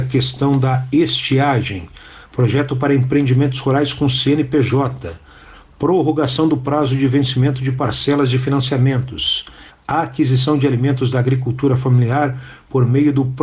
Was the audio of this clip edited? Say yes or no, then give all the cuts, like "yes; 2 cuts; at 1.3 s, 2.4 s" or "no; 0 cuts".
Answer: yes; 2 cuts; at 2.3 s, 9.7 s